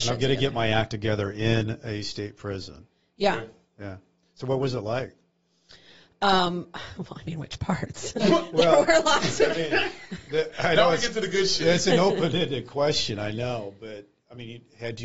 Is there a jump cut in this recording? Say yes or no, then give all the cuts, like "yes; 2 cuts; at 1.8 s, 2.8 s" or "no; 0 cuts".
no; 0 cuts